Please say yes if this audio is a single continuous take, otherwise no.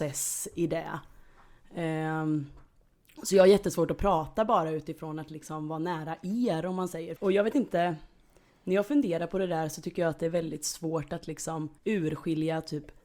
no